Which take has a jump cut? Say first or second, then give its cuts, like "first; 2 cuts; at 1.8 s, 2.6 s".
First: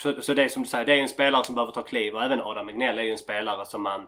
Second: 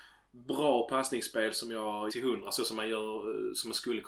second; 1 cut; at 2.1 s